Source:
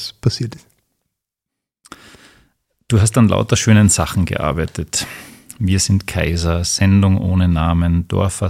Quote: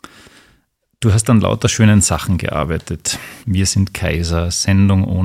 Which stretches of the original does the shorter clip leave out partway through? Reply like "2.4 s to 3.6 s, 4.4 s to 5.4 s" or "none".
5.3 s to 5.5 s